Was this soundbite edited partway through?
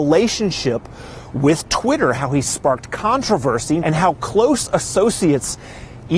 yes; 2 cuts; at 2.1 s, 3.8 s

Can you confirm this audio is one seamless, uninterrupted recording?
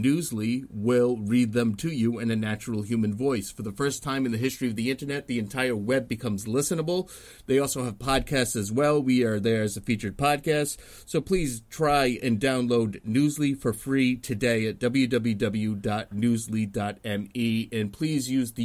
yes; 0 cuts

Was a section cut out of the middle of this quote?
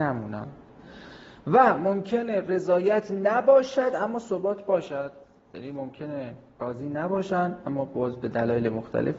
no; 0 cuts

